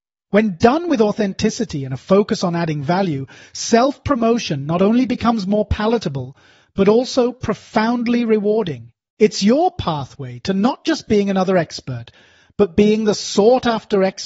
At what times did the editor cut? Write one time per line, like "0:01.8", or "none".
none